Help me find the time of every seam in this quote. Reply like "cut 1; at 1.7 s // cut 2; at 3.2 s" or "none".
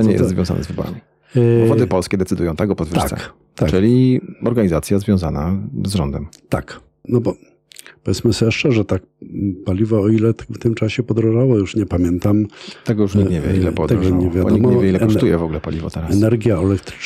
cut 1; at 7.0 s

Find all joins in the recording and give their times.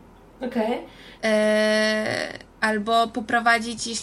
cut 1; at 1.2 s // cut 2; at 2.5 s

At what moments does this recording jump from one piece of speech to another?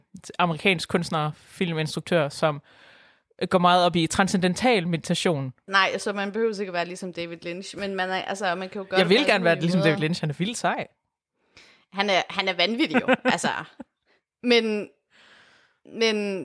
none

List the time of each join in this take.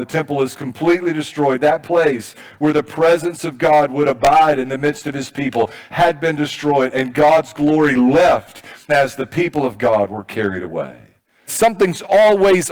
cut 1; at 8.9 s // cut 2; at 11.5 s

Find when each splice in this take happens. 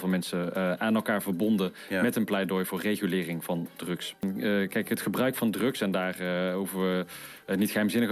none

